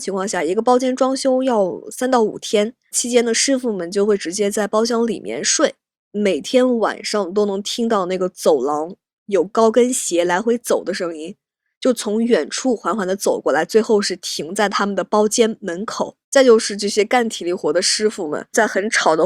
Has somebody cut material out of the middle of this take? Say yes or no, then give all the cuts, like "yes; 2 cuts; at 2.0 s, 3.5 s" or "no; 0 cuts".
yes; 1 cut; at 16.2 s